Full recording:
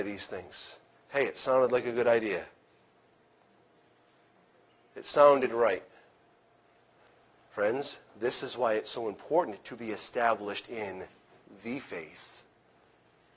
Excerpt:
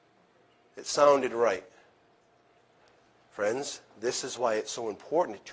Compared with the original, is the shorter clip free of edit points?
yes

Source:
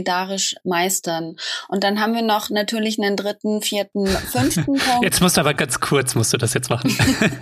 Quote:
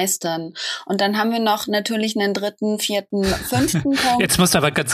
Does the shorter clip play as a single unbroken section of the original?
yes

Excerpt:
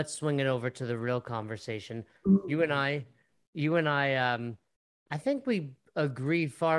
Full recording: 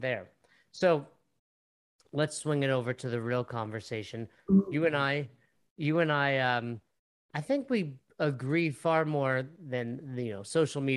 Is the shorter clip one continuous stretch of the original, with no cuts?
yes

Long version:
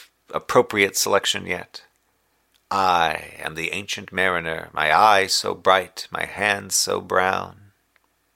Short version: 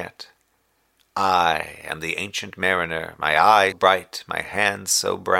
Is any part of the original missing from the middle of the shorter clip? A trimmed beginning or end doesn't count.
yes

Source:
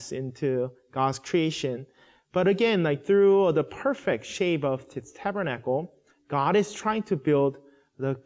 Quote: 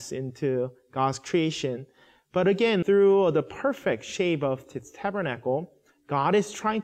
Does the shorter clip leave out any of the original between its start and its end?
yes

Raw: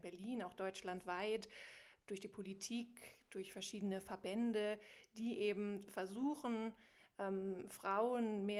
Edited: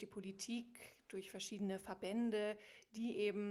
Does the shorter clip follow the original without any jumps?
yes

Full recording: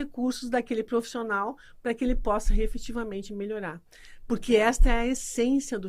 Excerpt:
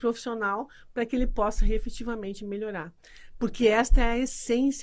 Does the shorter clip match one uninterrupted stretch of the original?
yes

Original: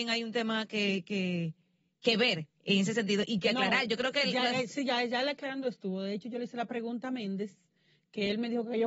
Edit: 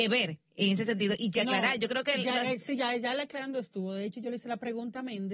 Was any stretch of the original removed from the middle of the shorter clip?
no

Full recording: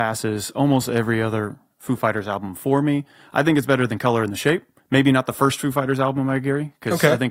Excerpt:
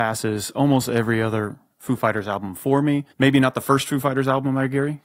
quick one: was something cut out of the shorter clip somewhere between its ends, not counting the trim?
yes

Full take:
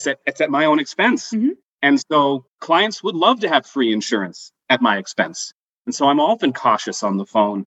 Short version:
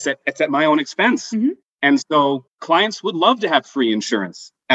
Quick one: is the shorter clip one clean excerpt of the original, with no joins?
yes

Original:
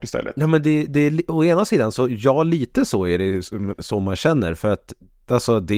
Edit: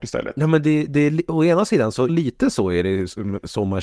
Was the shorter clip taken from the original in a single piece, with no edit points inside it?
no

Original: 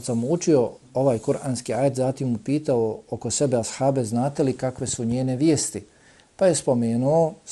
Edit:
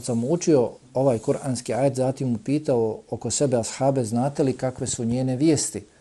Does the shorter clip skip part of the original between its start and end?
no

